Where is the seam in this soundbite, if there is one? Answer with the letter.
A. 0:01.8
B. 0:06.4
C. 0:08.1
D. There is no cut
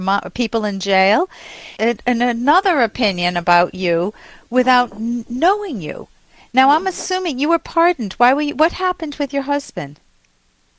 A